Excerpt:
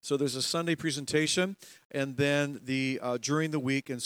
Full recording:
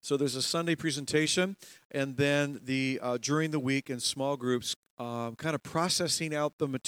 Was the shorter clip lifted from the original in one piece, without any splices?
yes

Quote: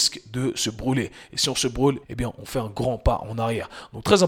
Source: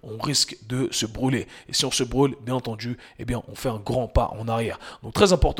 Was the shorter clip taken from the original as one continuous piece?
no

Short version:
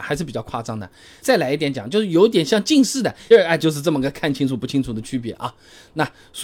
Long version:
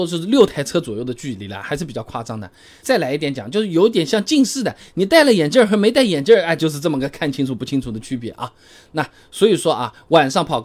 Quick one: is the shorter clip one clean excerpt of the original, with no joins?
no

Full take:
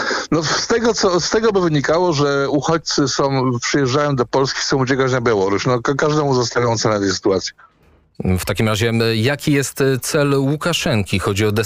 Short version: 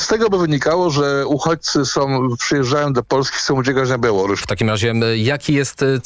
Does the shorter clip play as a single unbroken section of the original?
no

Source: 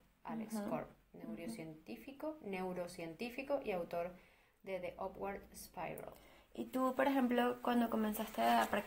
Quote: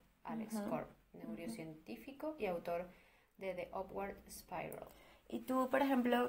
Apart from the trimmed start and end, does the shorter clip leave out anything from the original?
yes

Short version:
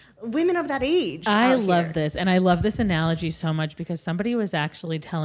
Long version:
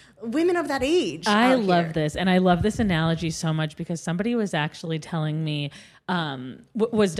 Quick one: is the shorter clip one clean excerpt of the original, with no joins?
yes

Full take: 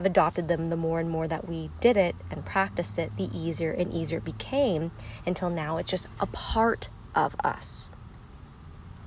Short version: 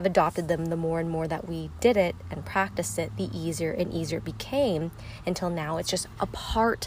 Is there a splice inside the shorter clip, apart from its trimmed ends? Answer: no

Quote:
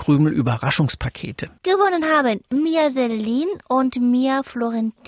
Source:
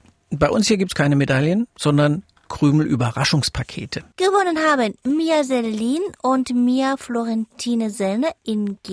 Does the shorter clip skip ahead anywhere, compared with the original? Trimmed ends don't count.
no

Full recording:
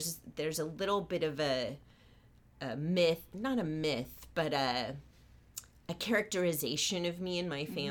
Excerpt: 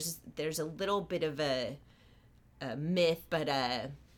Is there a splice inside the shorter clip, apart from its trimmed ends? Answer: yes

